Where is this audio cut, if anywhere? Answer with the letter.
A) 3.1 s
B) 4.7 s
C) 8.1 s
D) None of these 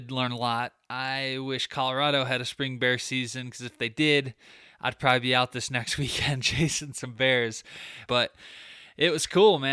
C